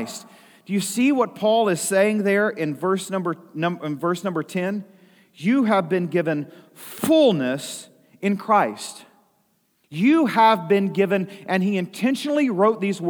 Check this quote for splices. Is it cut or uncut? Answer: uncut